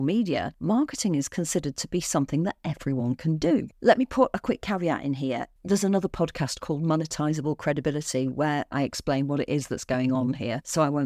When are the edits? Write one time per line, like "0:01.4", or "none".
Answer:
0:03.7
0:05.6